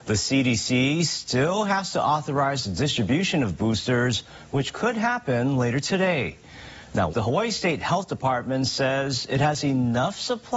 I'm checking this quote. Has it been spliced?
yes; 1 cut; at 7.1 s

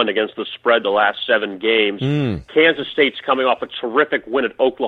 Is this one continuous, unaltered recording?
yes; 0 cuts

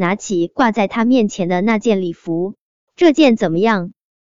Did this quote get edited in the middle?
yes; 1 cut; at 2.9 s

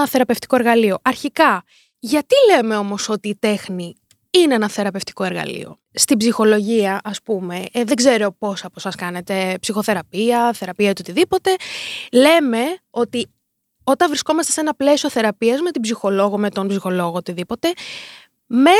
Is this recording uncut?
yes; 0 cuts

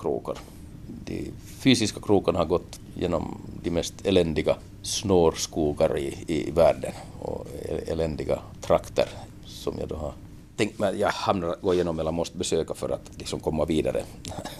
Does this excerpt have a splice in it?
no; 0 cuts

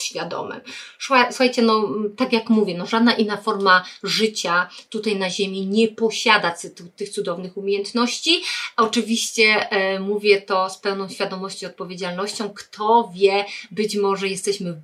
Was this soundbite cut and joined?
no; 0 cuts

